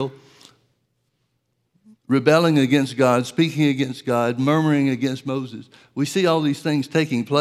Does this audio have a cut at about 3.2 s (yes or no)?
no